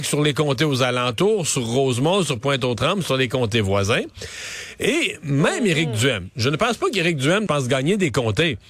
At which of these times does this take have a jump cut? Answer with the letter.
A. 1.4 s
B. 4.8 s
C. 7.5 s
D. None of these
C